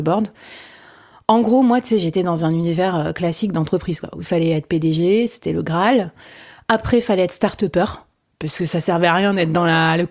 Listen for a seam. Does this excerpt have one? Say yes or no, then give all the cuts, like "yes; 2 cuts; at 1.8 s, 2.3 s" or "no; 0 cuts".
no; 0 cuts